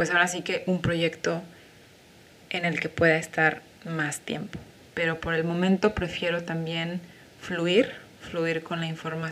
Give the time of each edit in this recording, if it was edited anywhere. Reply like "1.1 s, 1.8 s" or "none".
none